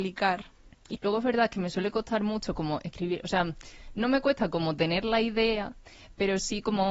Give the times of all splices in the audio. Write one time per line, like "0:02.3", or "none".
0:00.9